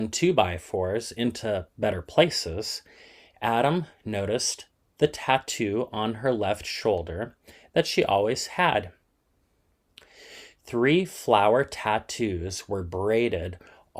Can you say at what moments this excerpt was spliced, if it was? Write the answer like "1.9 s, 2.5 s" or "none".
none